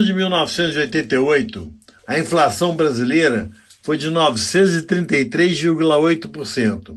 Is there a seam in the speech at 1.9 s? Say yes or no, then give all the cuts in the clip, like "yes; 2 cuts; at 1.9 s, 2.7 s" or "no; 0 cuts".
yes; 1 cut; at 1.9 s